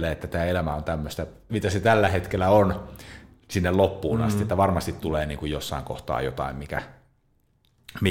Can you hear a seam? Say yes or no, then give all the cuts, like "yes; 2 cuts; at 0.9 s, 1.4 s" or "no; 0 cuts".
yes; 1 cut; at 1.5 s